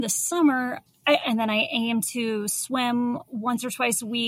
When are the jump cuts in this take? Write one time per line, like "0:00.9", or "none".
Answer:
0:01.2